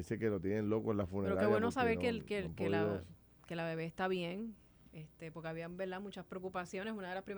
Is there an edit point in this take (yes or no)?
no